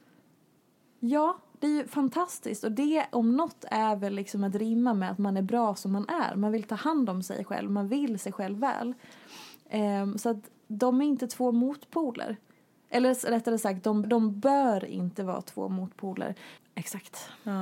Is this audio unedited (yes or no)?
no